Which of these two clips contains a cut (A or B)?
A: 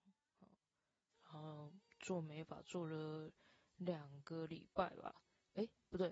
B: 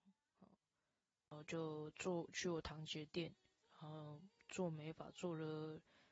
A